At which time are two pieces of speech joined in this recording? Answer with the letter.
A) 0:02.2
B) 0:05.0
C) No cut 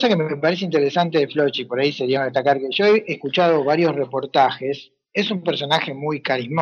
A